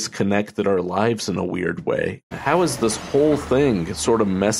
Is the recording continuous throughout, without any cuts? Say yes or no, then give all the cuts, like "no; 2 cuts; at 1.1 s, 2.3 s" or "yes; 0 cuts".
no; 1 cut; at 2.3 s